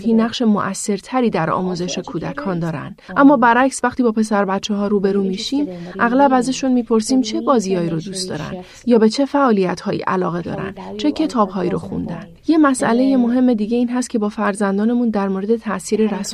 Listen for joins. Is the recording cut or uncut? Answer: cut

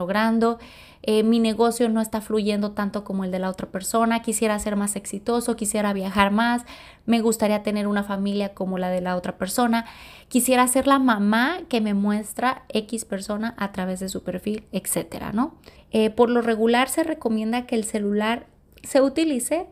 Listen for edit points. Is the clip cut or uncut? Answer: cut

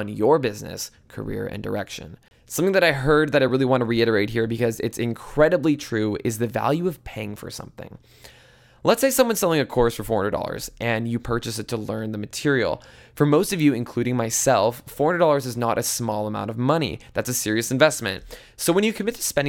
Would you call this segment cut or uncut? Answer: uncut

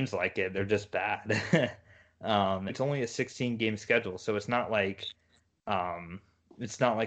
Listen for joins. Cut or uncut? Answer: cut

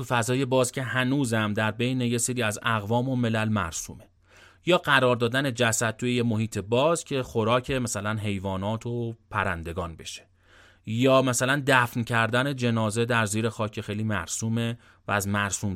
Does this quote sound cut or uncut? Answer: uncut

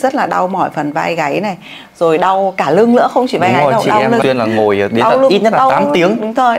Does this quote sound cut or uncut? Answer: cut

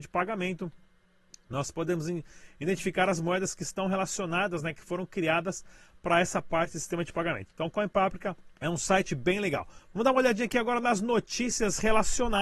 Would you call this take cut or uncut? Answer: cut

